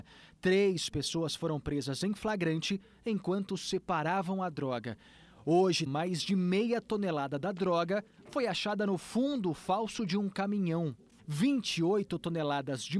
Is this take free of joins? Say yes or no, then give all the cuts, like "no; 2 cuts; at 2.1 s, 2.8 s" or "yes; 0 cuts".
no; 2 cuts; at 5.9 s, 11.2 s